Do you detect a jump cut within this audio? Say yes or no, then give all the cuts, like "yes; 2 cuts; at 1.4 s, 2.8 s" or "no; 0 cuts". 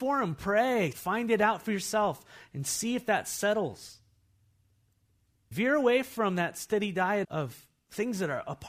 yes; 3 cuts; at 0.9 s, 5.5 s, 7.2 s